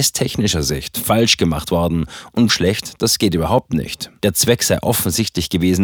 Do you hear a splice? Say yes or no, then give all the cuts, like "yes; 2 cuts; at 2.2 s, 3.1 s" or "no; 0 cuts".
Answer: yes; 2 cuts; at 2.5 s, 4.2 s